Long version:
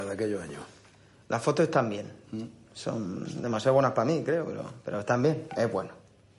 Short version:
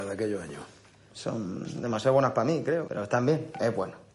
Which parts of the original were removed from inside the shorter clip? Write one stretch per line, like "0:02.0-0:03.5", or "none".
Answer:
0:01.1-0:02.7
0:04.4-0:04.8